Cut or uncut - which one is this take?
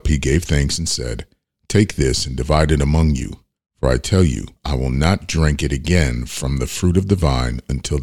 cut